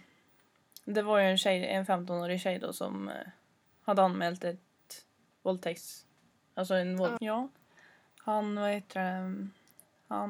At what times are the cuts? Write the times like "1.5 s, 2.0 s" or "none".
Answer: 7.2 s